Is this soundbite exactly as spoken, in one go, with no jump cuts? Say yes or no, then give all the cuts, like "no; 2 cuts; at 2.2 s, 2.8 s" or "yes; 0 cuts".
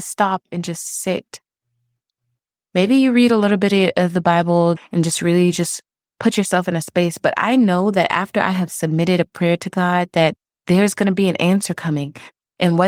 no; 1 cut; at 4.8 s